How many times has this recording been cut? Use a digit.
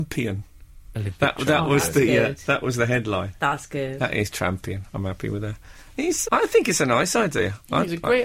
1